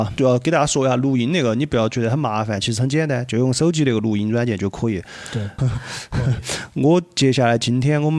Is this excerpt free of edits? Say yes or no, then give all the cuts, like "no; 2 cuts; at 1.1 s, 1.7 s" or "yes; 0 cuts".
no; 1 cut; at 5.6 s